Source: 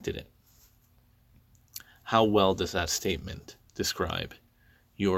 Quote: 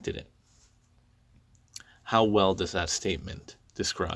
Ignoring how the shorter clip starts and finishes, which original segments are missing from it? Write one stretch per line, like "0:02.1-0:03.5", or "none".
none